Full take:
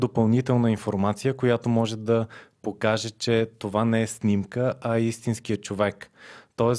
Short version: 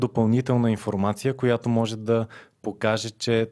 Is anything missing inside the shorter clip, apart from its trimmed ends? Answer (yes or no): no